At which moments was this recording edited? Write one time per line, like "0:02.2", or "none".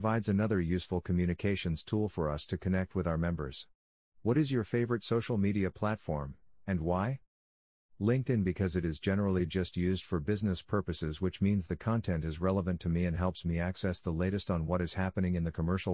0:04.1